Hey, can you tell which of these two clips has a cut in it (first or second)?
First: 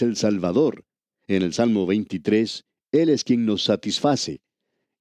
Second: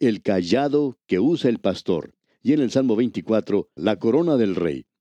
second